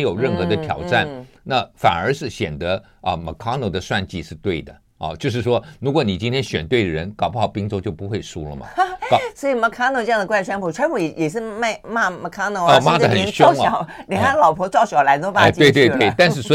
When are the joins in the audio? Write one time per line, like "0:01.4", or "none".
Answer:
none